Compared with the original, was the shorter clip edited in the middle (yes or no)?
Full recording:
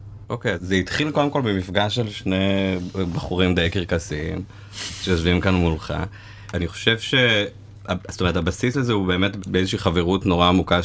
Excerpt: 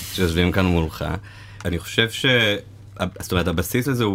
no